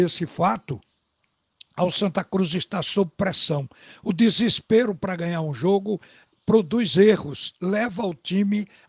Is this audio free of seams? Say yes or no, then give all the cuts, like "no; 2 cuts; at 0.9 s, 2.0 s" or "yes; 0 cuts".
yes; 0 cuts